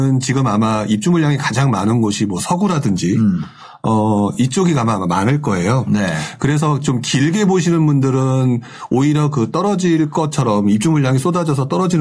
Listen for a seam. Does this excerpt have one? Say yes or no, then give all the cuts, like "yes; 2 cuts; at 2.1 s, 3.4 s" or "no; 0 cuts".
no; 0 cuts